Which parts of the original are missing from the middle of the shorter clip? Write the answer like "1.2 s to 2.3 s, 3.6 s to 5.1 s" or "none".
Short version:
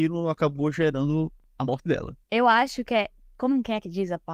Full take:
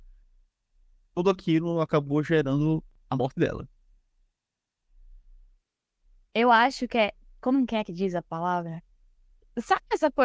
3.7 s to 6.3 s